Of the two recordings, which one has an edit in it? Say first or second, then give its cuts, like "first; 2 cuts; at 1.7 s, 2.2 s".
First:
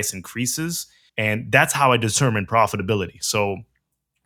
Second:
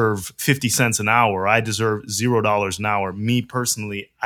first; 1 cut; at 1.1 s